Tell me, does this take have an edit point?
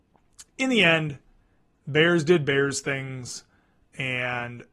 no; 0 cuts

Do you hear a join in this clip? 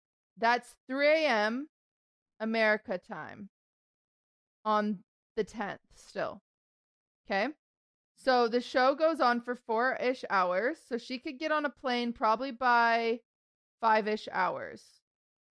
no; 0 cuts

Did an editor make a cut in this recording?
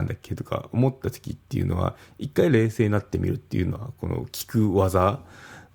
no; 0 cuts

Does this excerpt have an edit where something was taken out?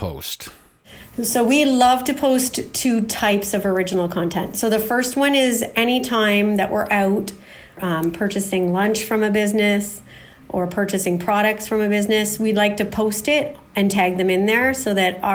no; 0 cuts

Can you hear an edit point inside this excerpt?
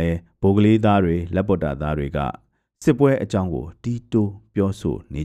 no; 0 cuts

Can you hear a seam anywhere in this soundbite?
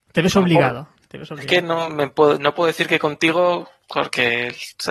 no; 0 cuts

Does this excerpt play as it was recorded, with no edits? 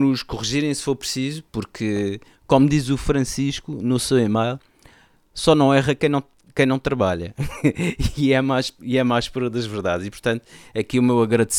yes; 0 cuts

